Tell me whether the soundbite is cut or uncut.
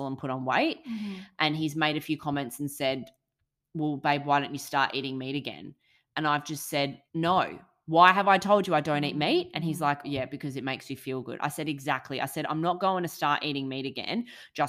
cut